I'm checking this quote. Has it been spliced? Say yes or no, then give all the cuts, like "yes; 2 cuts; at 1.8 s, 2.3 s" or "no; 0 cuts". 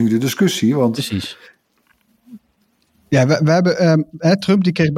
no; 0 cuts